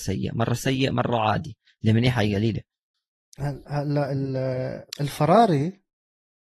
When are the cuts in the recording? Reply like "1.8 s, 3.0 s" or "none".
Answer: 4.9 s